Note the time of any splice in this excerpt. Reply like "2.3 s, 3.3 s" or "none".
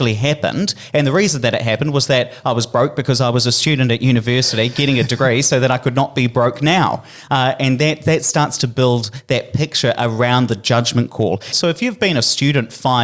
11.5 s